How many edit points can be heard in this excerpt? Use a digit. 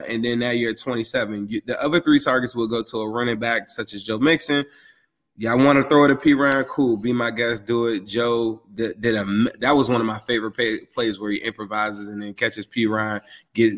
0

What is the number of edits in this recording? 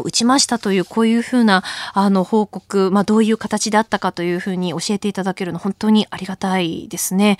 0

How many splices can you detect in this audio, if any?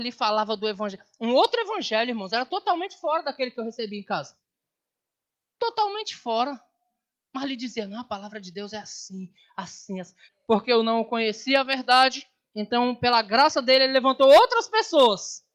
1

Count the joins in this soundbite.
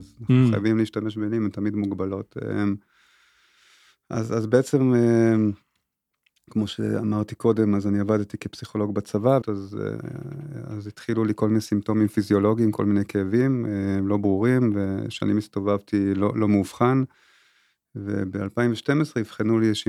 1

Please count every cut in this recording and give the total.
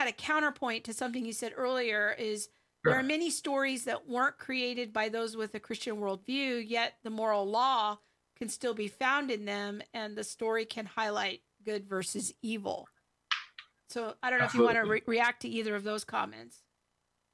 0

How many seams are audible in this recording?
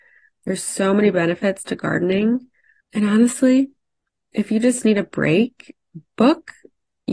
1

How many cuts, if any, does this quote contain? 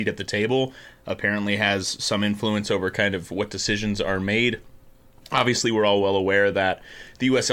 0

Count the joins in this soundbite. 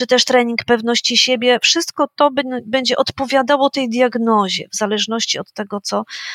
0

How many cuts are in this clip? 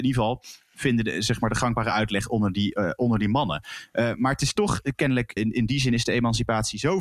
1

